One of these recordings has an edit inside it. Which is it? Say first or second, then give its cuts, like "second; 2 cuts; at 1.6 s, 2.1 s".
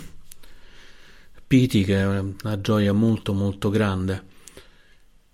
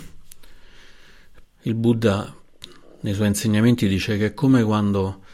second; 1 cut; at 1.4 s